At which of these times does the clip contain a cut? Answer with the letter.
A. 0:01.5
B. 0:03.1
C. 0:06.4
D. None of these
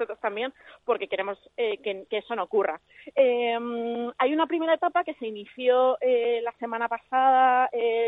D